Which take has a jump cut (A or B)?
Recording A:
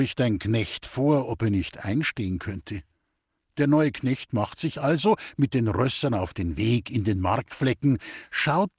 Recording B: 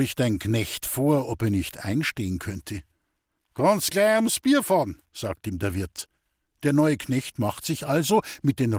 A